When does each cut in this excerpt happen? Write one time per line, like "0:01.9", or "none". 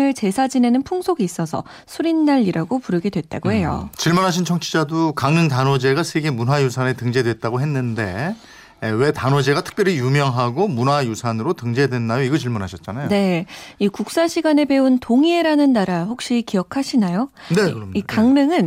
none